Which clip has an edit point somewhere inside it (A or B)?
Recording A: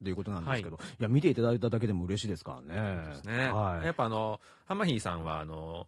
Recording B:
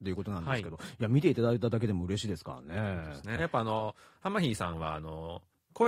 B